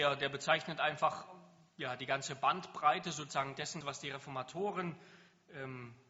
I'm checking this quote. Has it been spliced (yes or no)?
yes